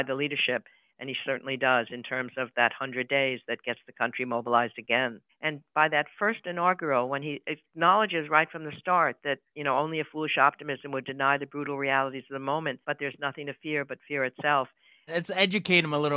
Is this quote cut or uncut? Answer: cut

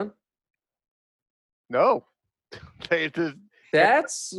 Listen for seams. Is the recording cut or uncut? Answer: uncut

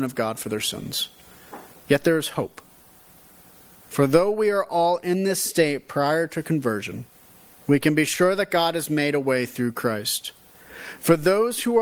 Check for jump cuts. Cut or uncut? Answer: uncut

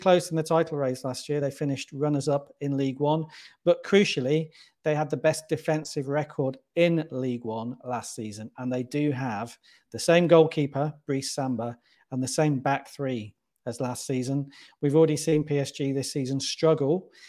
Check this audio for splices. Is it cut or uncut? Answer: uncut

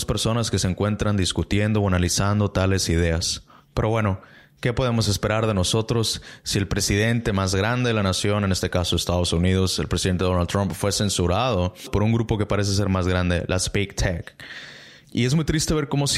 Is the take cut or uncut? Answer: cut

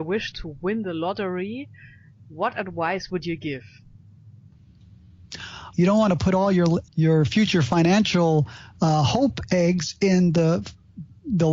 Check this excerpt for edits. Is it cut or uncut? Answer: cut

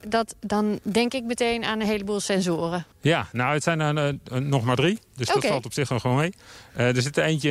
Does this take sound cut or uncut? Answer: uncut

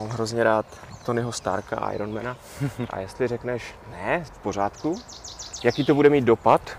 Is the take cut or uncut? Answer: cut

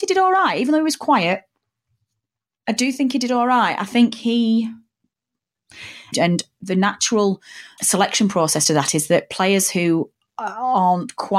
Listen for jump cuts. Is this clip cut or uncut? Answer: cut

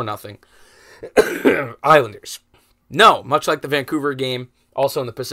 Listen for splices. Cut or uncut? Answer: cut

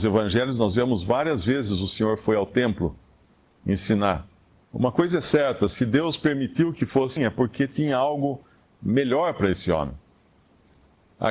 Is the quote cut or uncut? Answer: cut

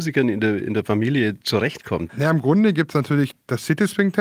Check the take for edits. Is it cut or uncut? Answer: cut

